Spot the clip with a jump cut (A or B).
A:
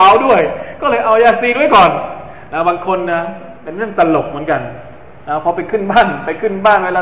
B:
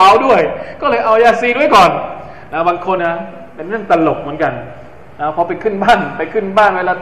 B